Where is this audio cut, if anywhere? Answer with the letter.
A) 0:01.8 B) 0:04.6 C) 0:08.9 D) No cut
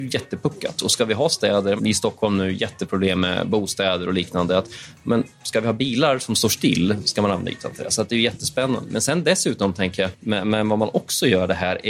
A